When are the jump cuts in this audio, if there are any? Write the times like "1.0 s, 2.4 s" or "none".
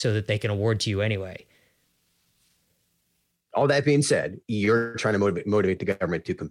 4.4 s

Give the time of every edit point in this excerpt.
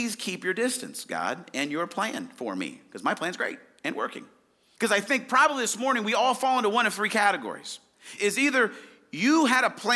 4.8 s, 8.2 s

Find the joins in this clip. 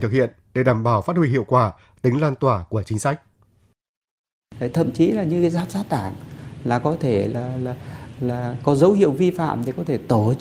none

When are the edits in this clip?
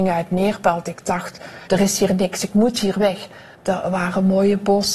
1.7 s, 3.5 s

